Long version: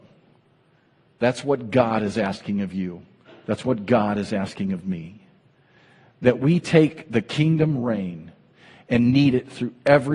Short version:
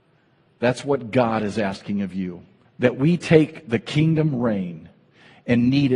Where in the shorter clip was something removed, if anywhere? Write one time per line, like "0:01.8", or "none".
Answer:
0:02.7